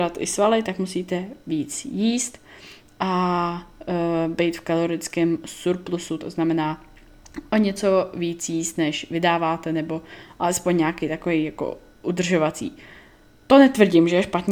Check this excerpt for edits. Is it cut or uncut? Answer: cut